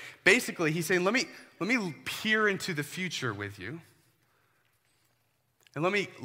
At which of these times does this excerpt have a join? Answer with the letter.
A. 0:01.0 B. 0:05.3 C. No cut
C